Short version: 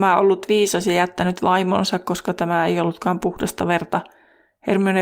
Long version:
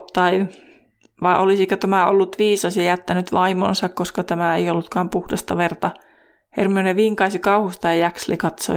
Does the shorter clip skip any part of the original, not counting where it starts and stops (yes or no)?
no